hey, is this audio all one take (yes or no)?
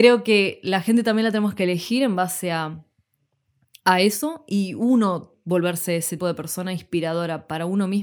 no